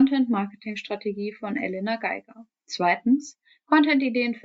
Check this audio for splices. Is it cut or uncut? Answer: uncut